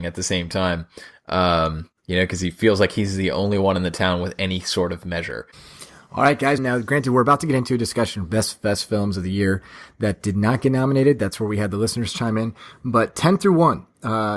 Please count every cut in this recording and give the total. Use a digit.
1